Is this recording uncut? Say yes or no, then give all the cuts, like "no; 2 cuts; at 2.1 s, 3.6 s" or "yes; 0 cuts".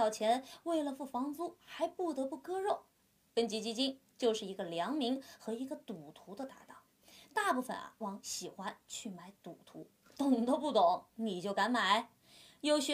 no; 2 cuts; at 8.0 s, 10.0 s